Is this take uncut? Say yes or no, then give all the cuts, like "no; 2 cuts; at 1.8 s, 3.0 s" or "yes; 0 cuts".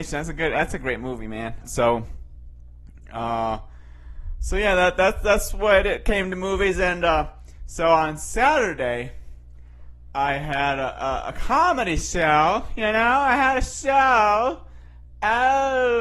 no; 1 cut; at 1.6 s